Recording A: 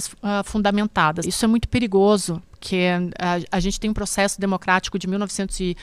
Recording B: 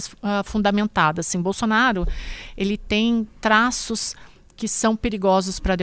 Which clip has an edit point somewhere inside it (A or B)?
A